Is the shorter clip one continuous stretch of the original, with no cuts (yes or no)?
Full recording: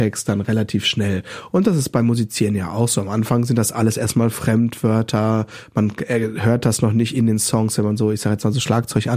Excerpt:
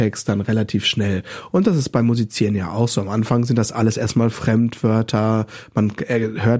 yes